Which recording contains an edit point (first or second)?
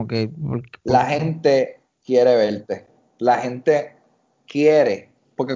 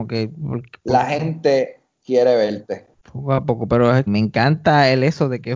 second